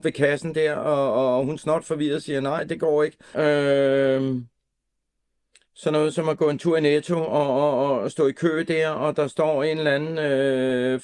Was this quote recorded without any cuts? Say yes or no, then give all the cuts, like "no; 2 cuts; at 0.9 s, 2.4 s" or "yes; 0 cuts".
no; 1 cut; at 3.3 s